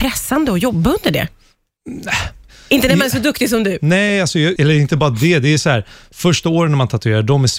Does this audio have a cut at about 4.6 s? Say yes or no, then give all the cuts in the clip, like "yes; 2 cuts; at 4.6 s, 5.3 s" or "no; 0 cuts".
yes; 1 cut; at 4.6 s